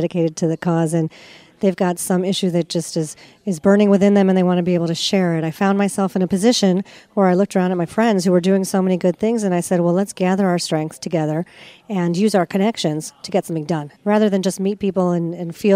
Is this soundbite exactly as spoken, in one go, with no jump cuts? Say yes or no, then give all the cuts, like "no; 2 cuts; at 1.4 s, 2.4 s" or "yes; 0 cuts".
no; 1 cut; at 13.9 s